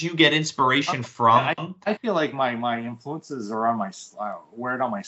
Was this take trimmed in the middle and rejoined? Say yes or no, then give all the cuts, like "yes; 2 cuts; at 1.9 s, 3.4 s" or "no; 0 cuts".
no; 0 cuts